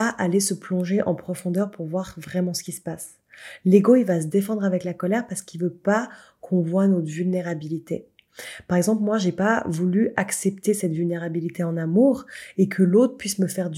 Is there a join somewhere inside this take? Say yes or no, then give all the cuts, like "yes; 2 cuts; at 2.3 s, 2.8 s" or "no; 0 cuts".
no; 0 cuts